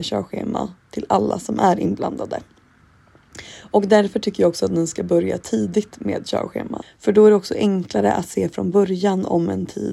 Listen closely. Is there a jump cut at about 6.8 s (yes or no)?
yes